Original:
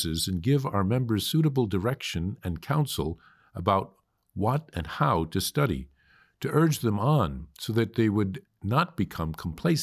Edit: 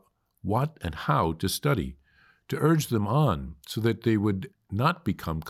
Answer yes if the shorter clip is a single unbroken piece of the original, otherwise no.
yes